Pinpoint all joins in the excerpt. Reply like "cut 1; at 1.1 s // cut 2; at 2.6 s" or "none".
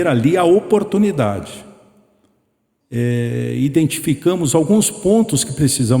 cut 1; at 2.8 s